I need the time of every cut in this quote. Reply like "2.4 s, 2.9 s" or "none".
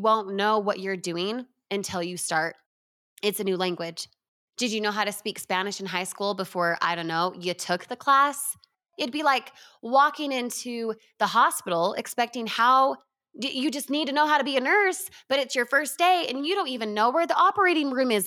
none